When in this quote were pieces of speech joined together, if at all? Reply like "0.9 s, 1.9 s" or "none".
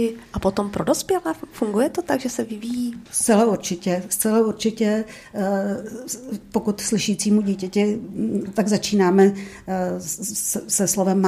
3.1 s